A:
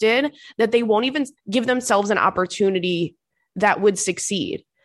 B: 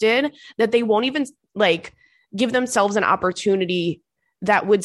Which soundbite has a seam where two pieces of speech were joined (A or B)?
A